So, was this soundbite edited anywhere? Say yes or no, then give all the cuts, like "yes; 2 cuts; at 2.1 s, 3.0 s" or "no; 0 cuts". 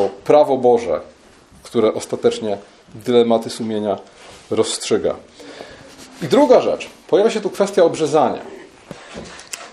no; 0 cuts